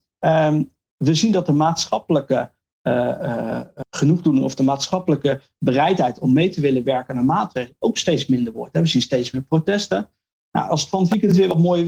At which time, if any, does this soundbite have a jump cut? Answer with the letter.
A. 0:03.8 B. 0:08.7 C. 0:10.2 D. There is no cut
A